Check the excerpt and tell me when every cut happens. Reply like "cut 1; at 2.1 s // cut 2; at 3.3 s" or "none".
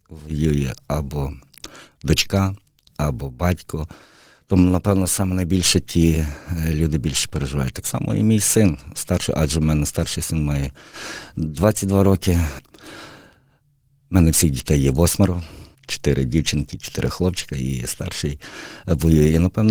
cut 1; at 12.6 s // cut 2; at 15.7 s